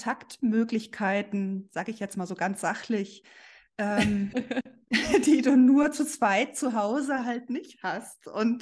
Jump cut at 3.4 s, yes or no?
no